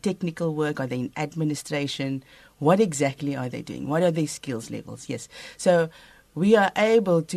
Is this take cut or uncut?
uncut